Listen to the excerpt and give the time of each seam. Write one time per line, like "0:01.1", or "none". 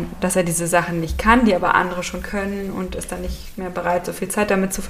none